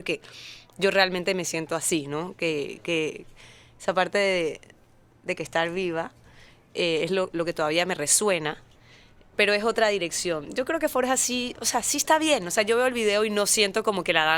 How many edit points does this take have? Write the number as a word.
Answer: two